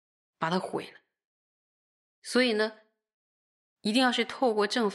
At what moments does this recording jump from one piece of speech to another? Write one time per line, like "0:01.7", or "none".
none